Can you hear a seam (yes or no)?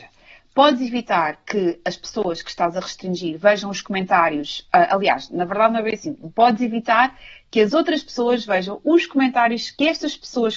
no